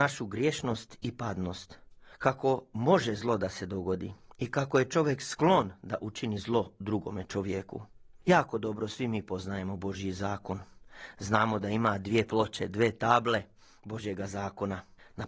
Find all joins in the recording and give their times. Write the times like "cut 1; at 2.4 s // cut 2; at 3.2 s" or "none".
none